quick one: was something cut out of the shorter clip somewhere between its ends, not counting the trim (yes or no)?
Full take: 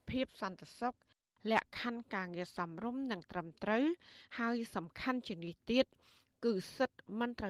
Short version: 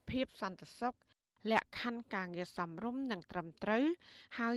no